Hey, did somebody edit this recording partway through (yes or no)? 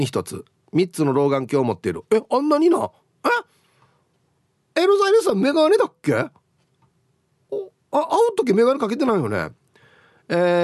no